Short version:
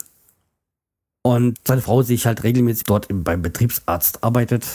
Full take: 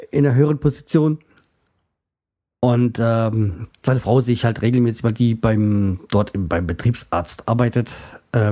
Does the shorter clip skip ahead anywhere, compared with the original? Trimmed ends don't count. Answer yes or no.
yes